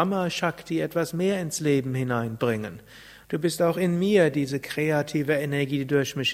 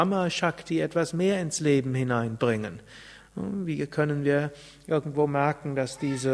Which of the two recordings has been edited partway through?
first; 1 cut; at 3.2 s

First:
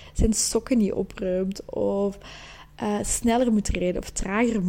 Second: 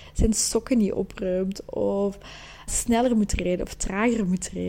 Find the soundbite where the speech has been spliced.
second; 1 cut; at 2.7 s

